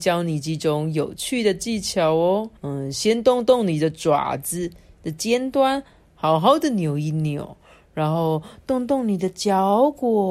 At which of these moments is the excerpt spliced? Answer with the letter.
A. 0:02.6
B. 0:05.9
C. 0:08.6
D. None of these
A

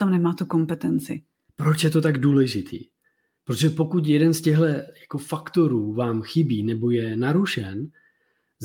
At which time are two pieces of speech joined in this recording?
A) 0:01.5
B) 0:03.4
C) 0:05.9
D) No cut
A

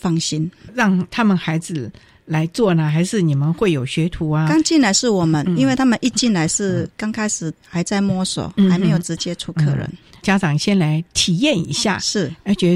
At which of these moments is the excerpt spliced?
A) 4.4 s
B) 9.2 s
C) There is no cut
B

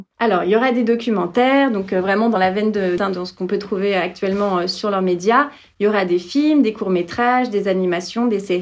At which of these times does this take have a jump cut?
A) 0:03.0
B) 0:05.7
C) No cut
A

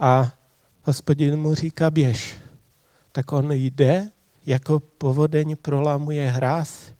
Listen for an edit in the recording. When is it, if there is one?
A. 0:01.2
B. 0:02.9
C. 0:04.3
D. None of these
C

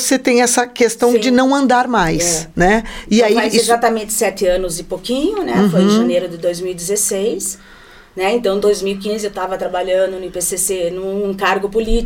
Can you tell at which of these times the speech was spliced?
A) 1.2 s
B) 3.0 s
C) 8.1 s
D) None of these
D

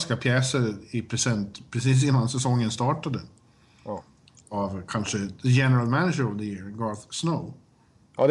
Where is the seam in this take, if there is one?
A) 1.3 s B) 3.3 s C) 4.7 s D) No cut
D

